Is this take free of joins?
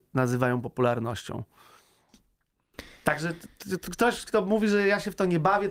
yes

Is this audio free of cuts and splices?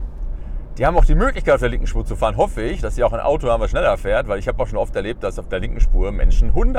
yes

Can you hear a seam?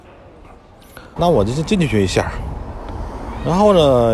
yes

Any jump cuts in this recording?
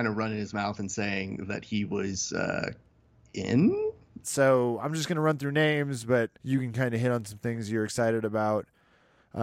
yes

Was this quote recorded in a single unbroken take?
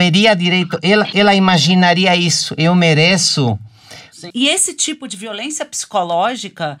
no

